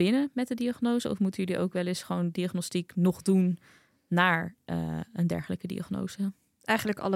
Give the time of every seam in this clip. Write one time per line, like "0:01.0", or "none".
none